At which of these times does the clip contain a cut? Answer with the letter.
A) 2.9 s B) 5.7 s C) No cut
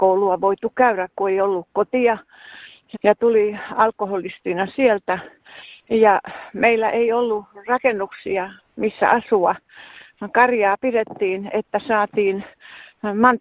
A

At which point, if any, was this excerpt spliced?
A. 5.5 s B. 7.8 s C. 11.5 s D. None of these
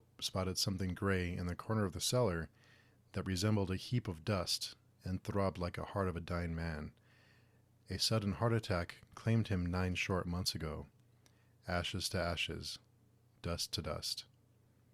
C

